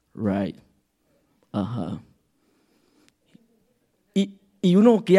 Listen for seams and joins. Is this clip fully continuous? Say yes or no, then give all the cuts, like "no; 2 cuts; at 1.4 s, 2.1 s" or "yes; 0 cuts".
yes; 0 cuts